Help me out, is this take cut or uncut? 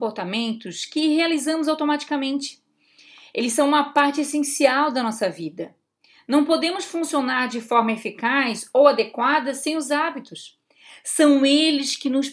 uncut